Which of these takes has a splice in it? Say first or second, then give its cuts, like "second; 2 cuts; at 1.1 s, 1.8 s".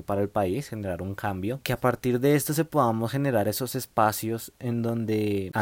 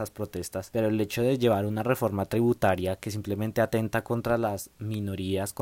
first; 1 cut; at 1.6 s